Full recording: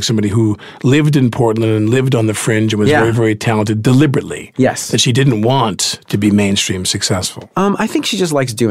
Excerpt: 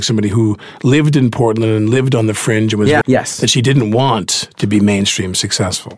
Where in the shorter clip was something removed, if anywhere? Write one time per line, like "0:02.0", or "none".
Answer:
0:03.0